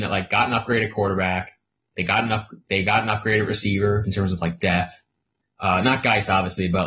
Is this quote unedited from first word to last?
no; 2 cuts; at 4.0 s, 5.4 s

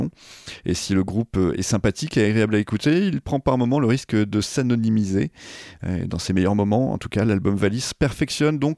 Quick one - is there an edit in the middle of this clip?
no; 0 cuts

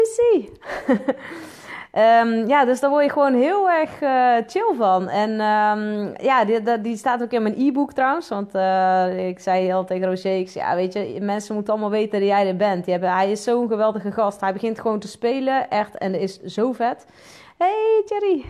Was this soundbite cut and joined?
no; 0 cuts

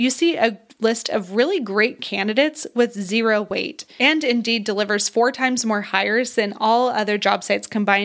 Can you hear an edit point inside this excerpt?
no; 0 cuts

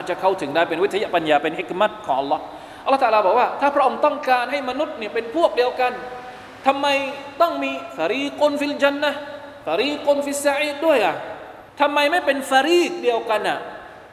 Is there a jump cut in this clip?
yes; 1 cut; at 11.7 s

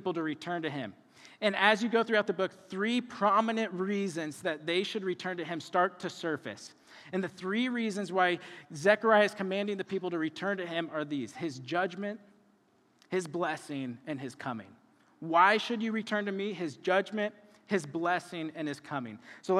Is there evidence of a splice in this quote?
no; 0 cuts

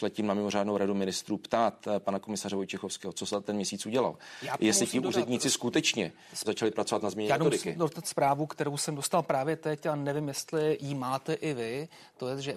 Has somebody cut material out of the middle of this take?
yes; 2 cuts; at 6.5 s, 7.8 s

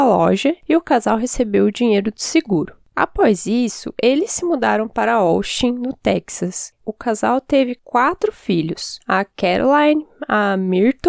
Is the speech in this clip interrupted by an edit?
yes; 1 cut; at 6.8 s

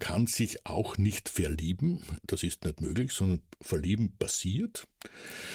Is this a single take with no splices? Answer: yes; 0 cuts

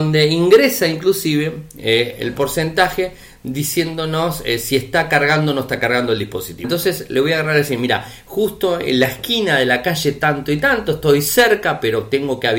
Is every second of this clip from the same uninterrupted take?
no; 1 cut; at 6.6 s

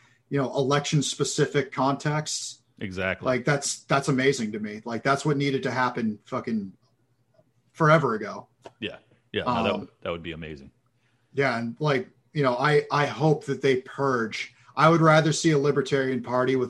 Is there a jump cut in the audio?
no; 0 cuts

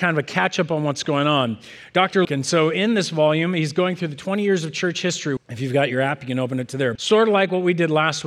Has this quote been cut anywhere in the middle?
yes; 3 cuts; at 2.2 s, 5.4 s, 7.0 s

